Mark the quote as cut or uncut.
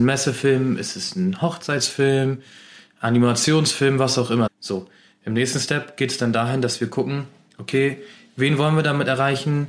cut